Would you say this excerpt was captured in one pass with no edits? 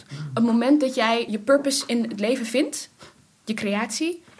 no; 1 cut; at 1.3 s

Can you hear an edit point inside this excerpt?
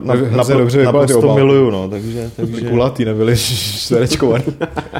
no; 0 cuts

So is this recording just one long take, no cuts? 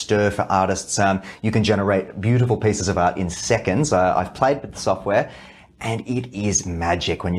yes; 0 cuts

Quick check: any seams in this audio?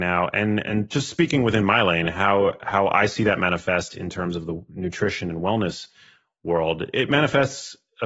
no; 0 cuts

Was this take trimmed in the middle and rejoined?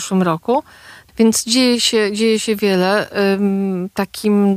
yes; 1 cut; at 1.1 s

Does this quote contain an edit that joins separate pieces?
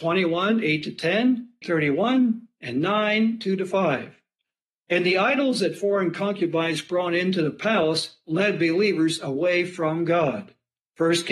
yes; 1 cut; at 1.6 s

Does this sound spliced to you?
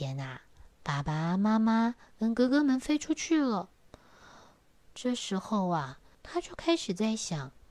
yes; 2 cuts; at 4.9 s, 6.1 s

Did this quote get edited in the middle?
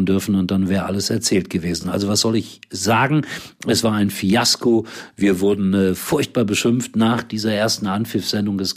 no; 0 cuts

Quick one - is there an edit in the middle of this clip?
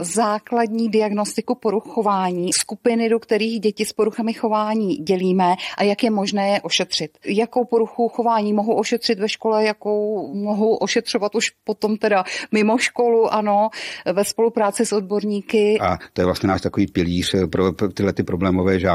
no; 0 cuts

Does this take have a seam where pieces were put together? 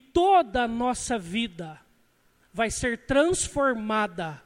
no; 0 cuts

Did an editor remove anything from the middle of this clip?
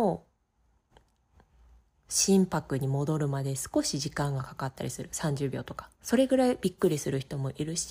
yes; 1 cut; at 5.9 s

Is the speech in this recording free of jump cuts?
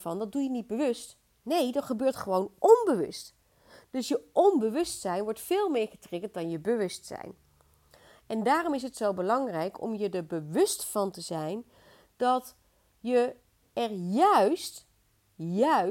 yes; 0 cuts

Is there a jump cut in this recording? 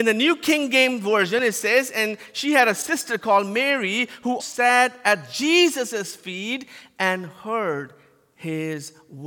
yes; 1 cut; at 4.4 s

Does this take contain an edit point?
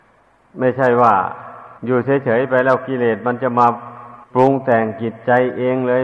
yes; 2 cuts; at 1.8 s, 4.2 s

